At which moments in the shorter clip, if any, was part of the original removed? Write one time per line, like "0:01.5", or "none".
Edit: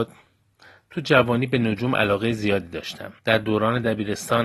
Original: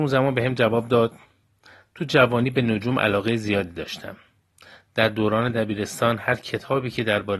0:03.2

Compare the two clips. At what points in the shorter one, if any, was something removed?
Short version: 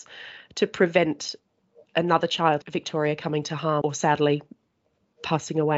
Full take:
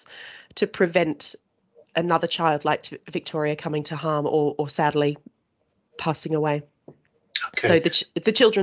0:02.6
0:03.8

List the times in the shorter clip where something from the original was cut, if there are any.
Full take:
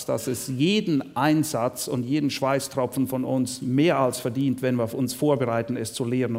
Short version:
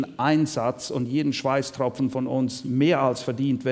none

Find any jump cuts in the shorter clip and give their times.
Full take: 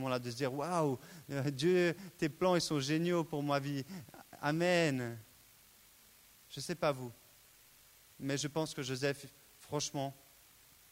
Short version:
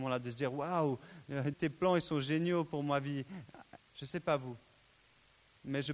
0:01.5
0:03.8

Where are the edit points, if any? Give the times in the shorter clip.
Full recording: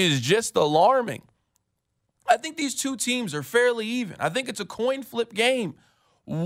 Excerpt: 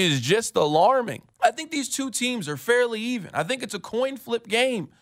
0:01.3

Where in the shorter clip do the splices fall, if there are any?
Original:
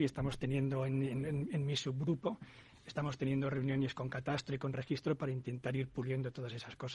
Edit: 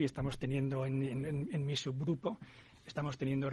none

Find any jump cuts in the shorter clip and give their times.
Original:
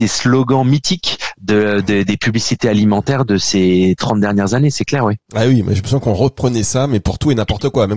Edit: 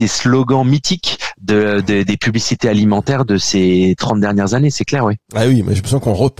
none

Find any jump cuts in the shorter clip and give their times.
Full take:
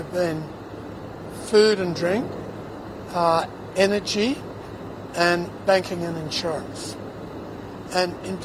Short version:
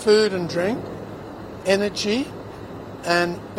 0:01.6

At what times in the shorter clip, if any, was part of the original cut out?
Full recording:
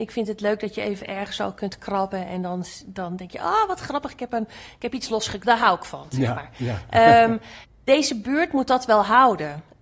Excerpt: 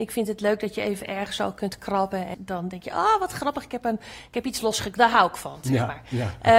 0:02.3

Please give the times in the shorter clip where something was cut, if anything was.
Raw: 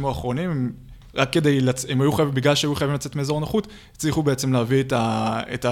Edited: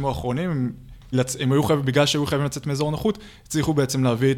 0:01.1

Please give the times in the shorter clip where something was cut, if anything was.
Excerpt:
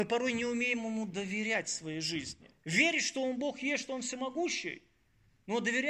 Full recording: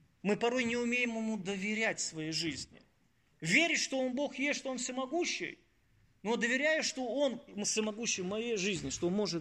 0:02.6

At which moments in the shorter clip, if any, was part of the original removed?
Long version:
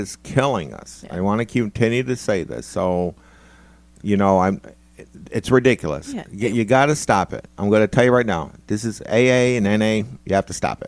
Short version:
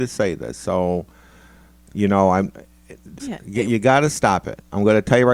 0:03.2

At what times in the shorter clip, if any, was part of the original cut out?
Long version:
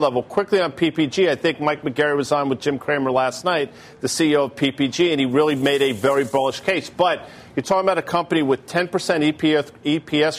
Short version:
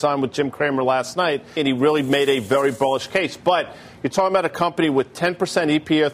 0:01.6

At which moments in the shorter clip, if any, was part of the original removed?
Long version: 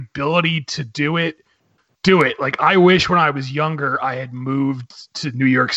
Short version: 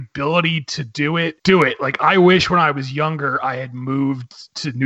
0:01.4

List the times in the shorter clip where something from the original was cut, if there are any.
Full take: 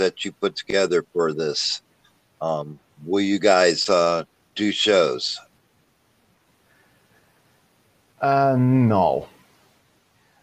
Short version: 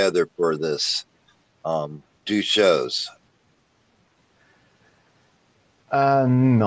0:02.2

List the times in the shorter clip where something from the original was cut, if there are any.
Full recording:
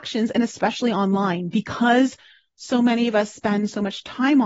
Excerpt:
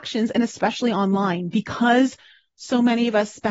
none

